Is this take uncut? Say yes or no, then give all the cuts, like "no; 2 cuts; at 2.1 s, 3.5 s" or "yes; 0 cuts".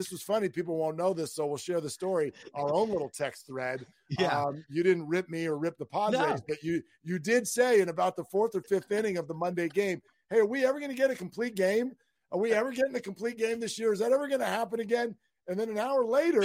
yes; 0 cuts